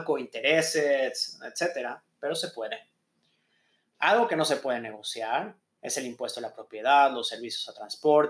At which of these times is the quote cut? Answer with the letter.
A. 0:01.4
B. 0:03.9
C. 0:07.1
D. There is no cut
D